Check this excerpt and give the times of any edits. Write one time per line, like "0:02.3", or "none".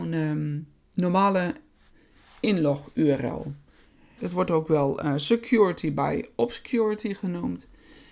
0:04.2